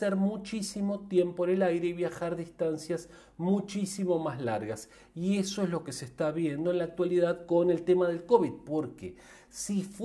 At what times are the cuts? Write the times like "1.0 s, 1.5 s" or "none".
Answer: none